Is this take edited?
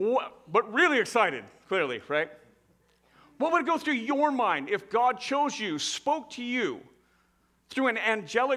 no; 0 cuts

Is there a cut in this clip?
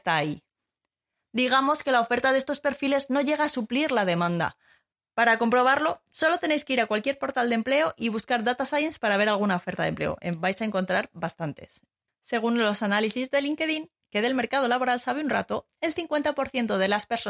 no; 0 cuts

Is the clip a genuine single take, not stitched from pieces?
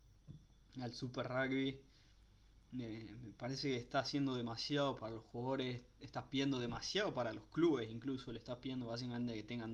yes; 0 cuts

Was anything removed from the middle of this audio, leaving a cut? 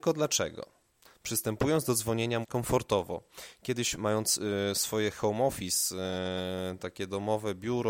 yes; 2 cuts; at 1.0 s, 2.4 s

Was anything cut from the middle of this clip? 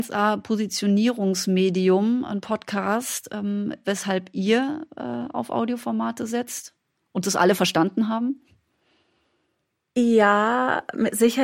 yes; 1 cut; at 3.8 s

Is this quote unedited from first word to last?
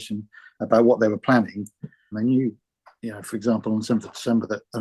no; 1 cut; at 2.1 s

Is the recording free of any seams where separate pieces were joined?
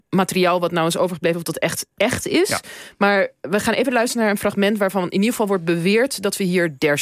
yes; 0 cuts

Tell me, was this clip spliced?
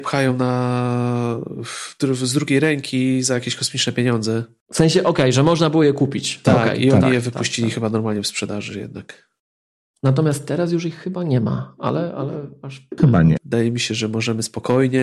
yes; 1 cut; at 13.4 s

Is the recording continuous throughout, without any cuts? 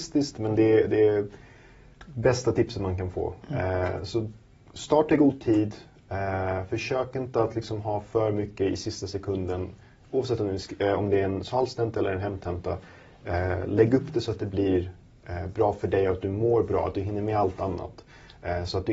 yes; 0 cuts

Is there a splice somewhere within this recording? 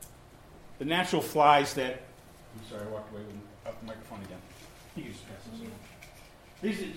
no; 0 cuts

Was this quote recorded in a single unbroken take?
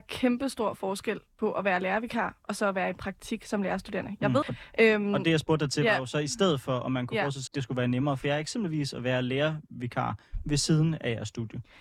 no; 2 cuts; at 4.4 s, 7.5 s

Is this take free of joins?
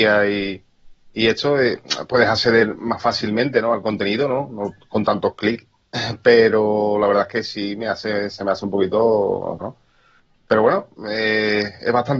no; 1 cut; at 9.6 s

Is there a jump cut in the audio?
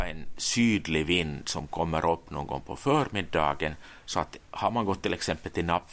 no; 0 cuts

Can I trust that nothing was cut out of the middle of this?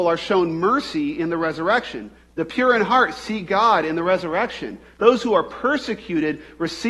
no; 1 cut; at 4.9 s

